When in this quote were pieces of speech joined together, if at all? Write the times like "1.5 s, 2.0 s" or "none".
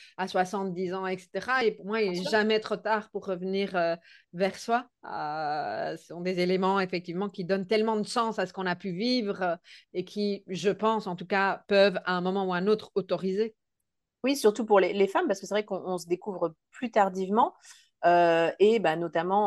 none